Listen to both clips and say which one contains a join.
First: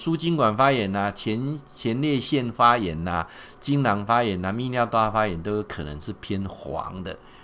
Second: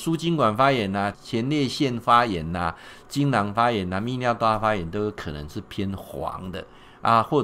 second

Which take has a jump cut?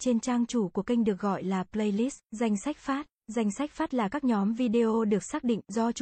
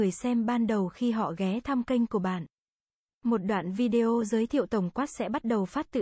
first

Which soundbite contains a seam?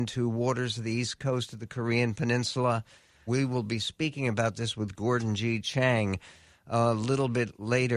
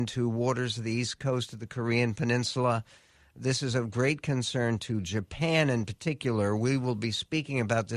first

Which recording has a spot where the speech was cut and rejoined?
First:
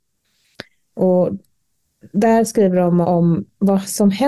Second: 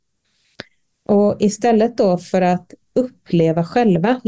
first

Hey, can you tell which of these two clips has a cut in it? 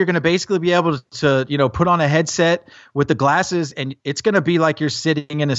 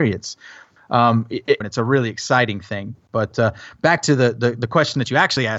second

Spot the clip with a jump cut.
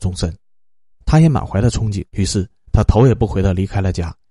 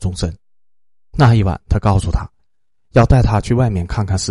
first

